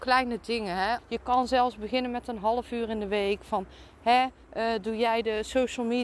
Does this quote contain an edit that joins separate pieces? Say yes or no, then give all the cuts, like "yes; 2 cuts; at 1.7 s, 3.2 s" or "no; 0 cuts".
yes; 1 cut; at 1.0 s